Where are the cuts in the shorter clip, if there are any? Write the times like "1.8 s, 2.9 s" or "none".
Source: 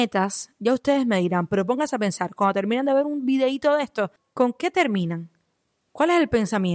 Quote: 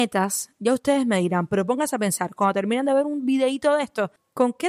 none